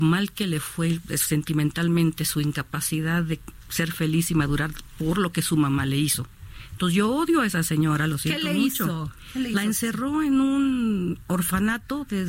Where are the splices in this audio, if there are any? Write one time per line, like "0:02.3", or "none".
none